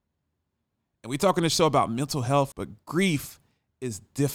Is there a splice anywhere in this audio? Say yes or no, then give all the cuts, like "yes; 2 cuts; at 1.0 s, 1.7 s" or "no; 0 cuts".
yes; 1 cut; at 2.5 s